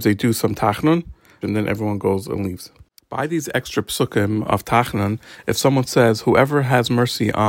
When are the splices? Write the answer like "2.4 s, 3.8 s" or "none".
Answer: 1.4 s, 3.0 s

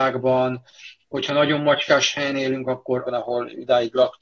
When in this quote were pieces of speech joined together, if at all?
3.1 s

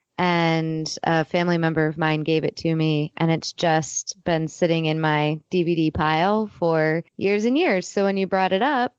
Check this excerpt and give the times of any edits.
7.1 s

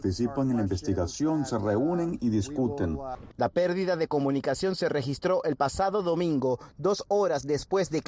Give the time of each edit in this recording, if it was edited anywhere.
3.3 s

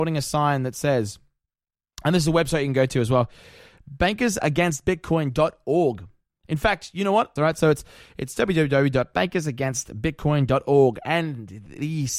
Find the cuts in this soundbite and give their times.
7.4 s

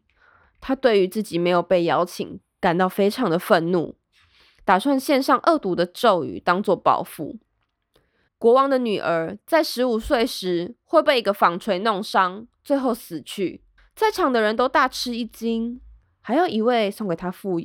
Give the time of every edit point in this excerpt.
8.3 s, 16.0 s

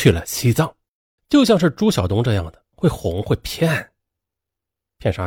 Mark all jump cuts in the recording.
1.2 s, 2.7 s

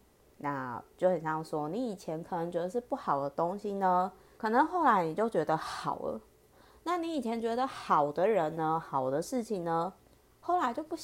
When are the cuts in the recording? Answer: 4.4 s

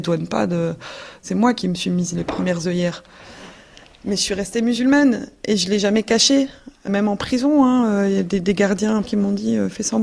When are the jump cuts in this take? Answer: none

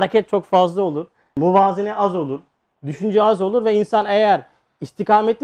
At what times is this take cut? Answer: none

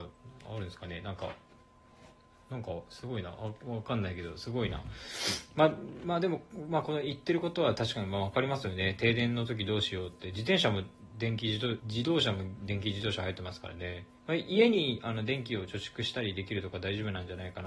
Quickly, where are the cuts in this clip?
11.8 s, 14.2 s

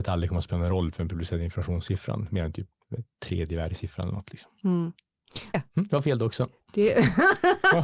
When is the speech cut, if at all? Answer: 5.5 s

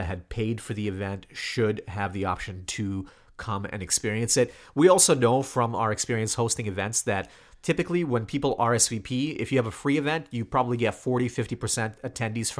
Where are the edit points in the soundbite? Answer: none

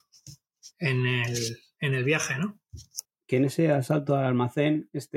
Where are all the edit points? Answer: 3.1 s

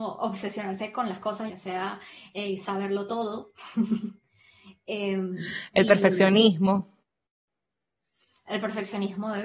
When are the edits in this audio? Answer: 1.5 s

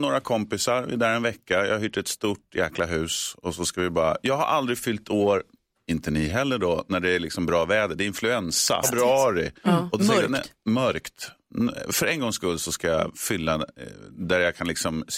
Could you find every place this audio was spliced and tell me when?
8.8 s

